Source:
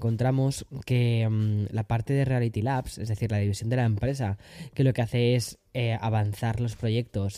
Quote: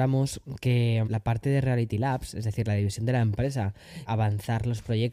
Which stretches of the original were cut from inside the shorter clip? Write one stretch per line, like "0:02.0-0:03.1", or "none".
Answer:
0:01.3-0:01.7
0:04.7-0:06.0